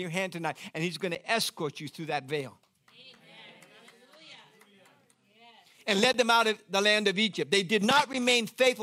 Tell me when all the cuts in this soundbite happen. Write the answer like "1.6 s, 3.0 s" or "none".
none